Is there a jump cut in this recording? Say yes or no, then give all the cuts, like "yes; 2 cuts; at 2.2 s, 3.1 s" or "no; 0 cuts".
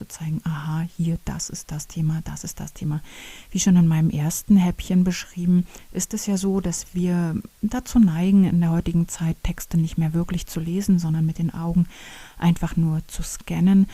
no; 0 cuts